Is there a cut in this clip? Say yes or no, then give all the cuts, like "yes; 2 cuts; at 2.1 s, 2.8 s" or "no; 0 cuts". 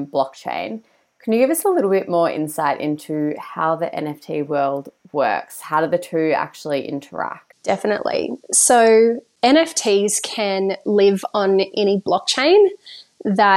no; 0 cuts